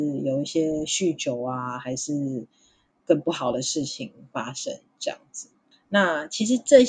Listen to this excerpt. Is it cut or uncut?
uncut